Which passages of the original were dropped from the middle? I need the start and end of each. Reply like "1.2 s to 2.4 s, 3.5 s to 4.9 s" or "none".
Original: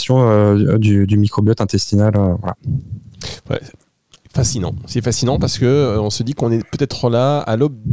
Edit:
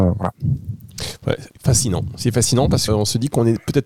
3.7 s to 4.2 s, 5.6 s to 5.9 s